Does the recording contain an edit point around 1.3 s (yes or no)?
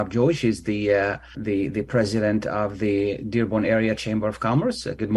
yes